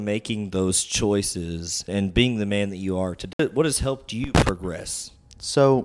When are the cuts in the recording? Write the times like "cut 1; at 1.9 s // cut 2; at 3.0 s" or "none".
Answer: cut 1; at 1.9 s